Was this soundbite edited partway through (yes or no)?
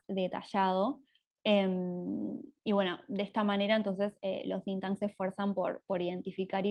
no